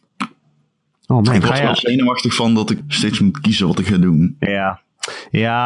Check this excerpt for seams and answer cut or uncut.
cut